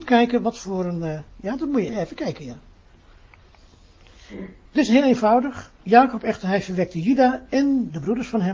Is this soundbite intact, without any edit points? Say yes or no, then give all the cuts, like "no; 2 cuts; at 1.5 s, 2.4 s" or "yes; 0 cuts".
no; 1 cut; at 1.9 s